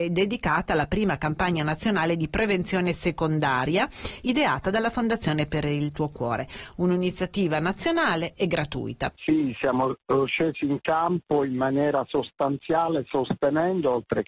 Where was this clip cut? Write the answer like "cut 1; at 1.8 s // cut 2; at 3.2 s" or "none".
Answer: cut 1; at 9.1 s